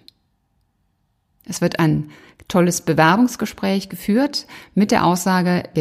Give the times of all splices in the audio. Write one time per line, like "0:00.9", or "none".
none